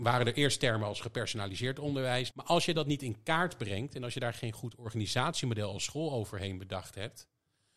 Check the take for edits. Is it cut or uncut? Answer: cut